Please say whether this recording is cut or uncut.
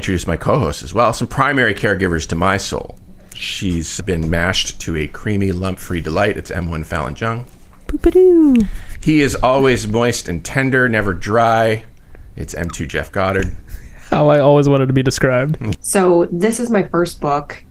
cut